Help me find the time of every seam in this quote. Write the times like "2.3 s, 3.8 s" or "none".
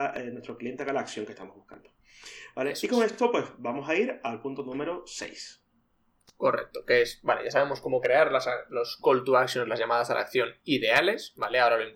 none